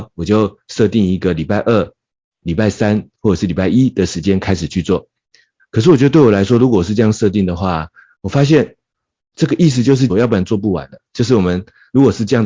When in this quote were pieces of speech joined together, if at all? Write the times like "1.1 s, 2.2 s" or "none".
5.6 s, 8.2 s, 10.1 s